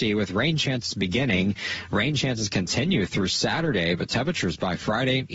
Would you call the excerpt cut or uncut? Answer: uncut